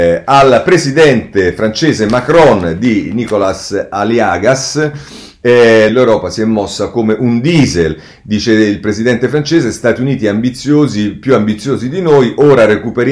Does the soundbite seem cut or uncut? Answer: cut